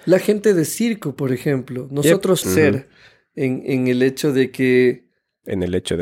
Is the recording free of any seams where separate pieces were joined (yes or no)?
no